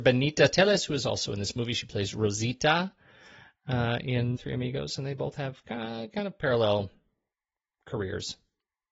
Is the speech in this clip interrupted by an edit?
yes; 1 cut; at 4.4 s

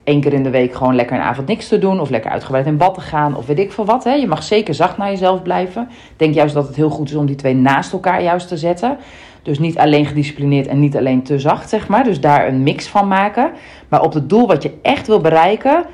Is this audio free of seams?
yes; 0 cuts

